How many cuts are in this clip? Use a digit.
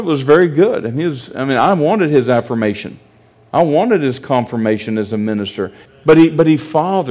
1